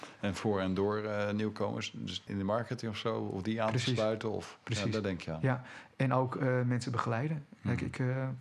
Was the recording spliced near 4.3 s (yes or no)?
no